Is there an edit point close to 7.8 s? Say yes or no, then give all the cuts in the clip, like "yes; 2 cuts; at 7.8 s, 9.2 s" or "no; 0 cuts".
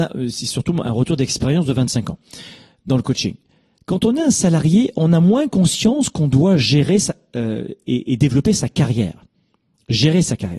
no; 0 cuts